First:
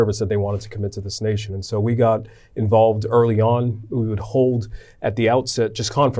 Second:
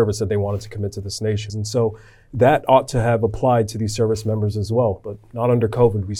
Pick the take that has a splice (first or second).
second